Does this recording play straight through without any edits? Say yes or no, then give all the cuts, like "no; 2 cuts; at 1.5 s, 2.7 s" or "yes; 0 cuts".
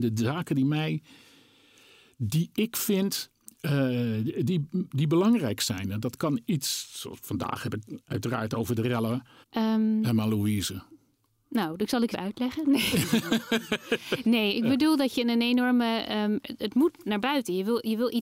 no; 2 cuts; at 9.4 s, 12.1 s